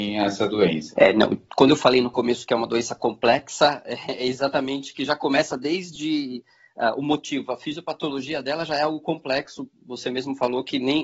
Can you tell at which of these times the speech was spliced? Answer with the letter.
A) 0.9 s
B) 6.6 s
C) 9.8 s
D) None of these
A